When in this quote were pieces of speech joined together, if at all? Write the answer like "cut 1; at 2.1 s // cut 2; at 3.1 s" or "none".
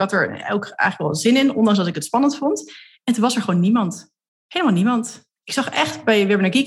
cut 1; at 5.4 s